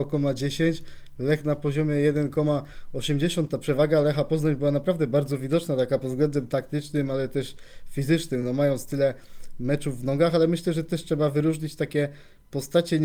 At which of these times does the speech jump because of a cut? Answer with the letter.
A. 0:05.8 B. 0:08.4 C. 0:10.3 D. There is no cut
D